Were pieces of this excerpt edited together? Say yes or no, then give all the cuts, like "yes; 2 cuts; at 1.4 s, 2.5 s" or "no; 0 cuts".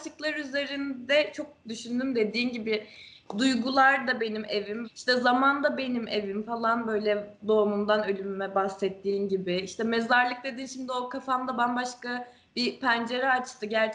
yes; 1 cut; at 4.8 s